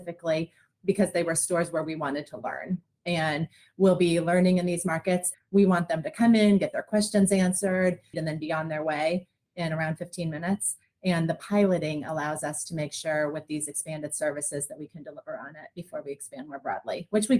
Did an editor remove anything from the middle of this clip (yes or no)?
yes